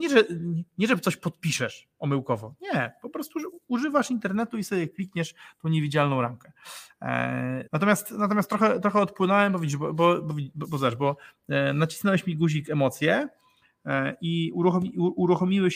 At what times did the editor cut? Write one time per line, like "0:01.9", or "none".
0:07.7